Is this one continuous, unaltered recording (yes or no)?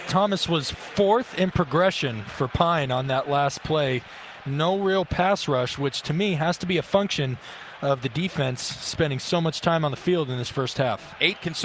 yes